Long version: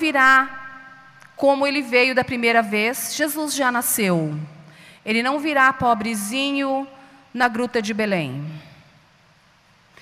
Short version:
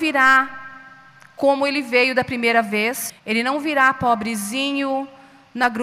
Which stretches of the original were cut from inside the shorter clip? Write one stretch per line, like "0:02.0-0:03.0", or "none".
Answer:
0:03.1-0:04.9